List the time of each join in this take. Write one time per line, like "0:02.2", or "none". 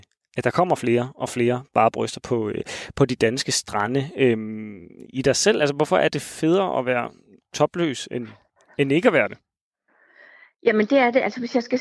0:05.1